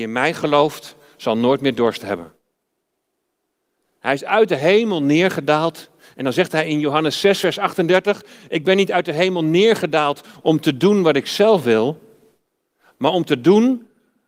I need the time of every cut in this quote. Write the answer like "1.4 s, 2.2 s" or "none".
none